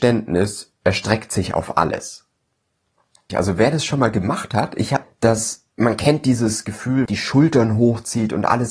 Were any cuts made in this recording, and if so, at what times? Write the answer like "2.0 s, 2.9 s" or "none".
3.3 s, 5.0 s, 7.1 s